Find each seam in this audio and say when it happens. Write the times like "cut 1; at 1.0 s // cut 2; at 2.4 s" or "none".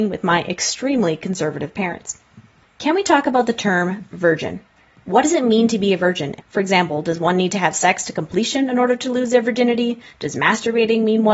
cut 1; at 6.4 s